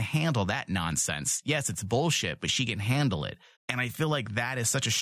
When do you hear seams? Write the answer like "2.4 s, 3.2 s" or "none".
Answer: 3.6 s